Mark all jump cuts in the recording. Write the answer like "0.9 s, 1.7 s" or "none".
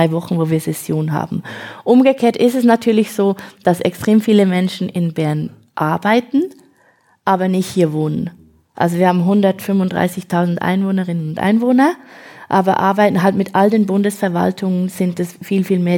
none